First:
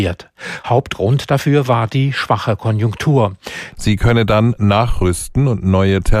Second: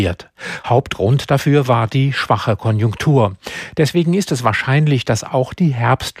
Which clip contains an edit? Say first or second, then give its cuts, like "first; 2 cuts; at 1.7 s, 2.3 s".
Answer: first; 1 cut; at 3.7 s